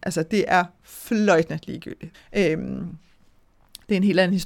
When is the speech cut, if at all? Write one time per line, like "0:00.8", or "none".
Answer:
0:02.1